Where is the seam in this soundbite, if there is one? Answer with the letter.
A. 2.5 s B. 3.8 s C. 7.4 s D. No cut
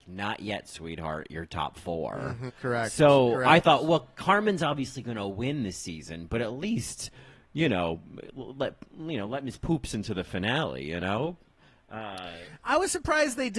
A